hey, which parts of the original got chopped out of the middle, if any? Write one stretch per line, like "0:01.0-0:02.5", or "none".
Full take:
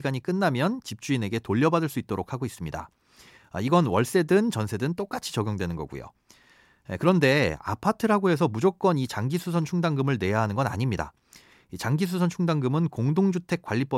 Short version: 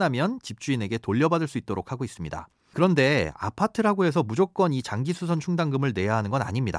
0:03.1-0:07.0